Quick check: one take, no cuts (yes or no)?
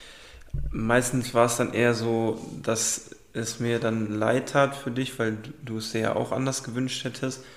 yes